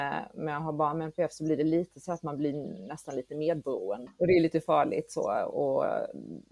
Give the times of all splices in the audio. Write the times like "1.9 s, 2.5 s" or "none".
4.1 s